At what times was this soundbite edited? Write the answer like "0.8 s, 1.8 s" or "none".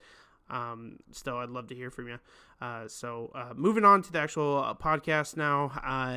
1.0 s